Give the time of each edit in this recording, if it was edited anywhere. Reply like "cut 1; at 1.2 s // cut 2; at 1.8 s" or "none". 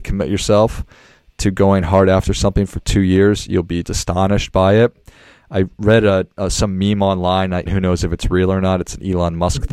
cut 1; at 3.8 s // cut 2; at 7.7 s